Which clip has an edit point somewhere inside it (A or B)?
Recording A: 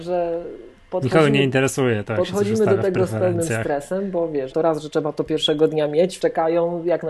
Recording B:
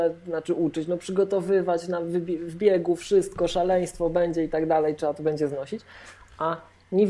A